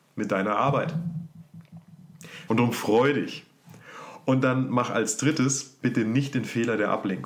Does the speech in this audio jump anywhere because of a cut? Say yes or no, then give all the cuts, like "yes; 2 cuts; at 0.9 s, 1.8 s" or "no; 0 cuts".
yes; 2 cuts; at 2.5 s, 5.8 s